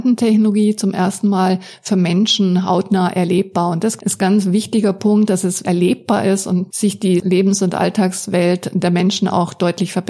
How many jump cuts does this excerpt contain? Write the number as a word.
two